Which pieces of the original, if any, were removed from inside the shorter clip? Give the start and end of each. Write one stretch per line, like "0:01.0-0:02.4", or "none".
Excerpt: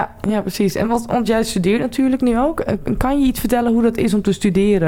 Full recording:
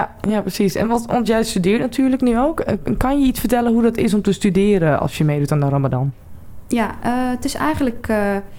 none